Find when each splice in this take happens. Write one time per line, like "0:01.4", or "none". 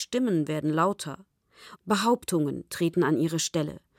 0:01.8